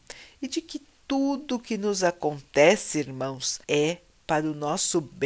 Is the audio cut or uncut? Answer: cut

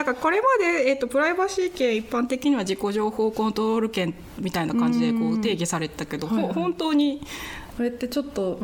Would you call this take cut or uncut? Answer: cut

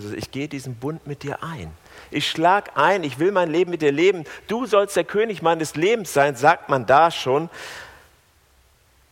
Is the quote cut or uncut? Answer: uncut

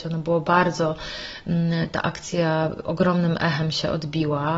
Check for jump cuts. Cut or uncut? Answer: uncut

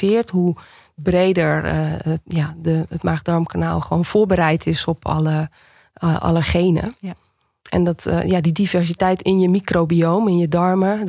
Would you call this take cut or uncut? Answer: uncut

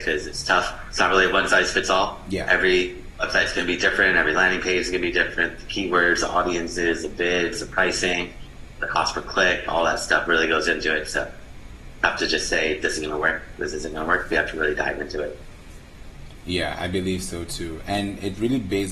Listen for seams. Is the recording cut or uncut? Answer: uncut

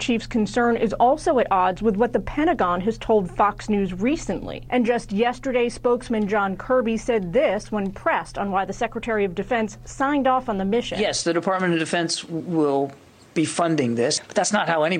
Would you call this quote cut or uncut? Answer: cut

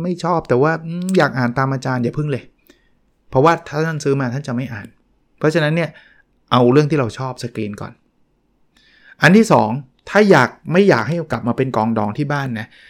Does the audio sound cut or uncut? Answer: uncut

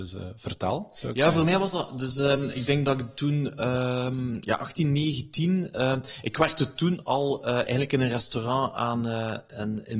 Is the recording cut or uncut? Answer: uncut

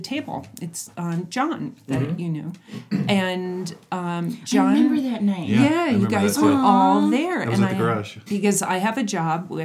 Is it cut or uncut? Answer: cut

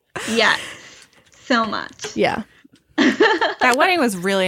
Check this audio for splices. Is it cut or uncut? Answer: uncut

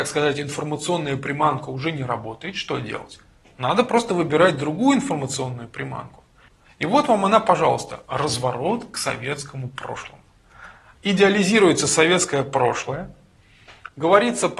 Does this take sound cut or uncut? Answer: uncut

